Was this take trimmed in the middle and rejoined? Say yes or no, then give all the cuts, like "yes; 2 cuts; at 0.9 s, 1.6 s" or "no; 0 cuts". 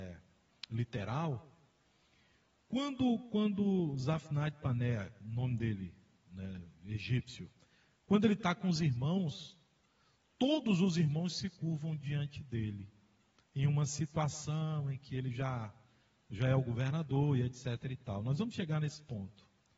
no; 0 cuts